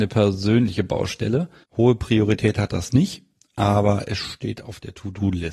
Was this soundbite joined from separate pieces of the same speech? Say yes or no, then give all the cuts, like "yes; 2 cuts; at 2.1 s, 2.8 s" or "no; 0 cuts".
yes; 1 cut; at 1.6 s